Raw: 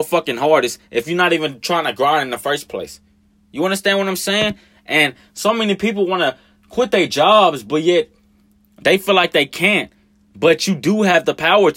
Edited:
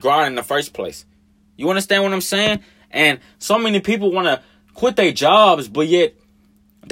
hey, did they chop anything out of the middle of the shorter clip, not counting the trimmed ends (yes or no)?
no